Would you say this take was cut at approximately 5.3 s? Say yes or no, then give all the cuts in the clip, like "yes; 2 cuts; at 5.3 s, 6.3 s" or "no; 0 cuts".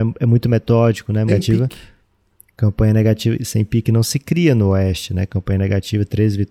no; 1 cut; at 1.3 s